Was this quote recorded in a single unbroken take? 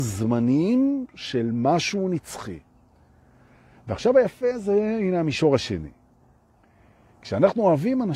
yes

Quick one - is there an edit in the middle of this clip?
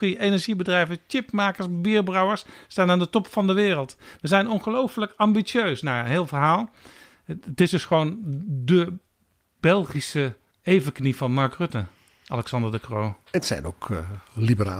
no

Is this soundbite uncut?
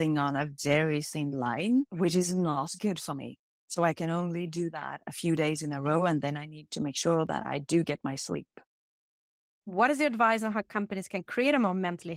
yes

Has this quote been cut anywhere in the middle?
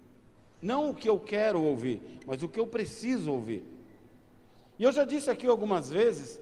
no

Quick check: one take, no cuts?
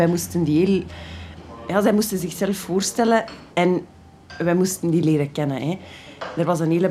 no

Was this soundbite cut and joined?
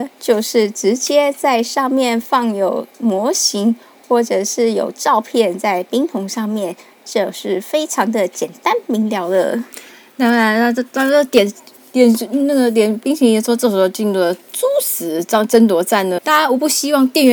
yes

